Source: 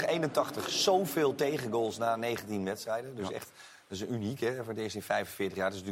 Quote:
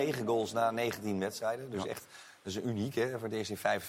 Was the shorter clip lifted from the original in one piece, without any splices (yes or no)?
yes